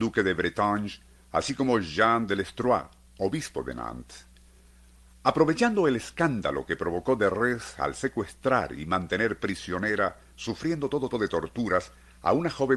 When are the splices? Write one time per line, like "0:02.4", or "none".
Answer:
0:11.1